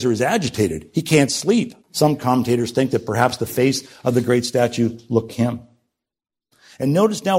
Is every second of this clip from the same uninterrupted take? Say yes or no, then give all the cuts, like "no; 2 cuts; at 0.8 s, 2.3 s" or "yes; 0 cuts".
no; 2 cuts; at 1.8 s, 5.3 s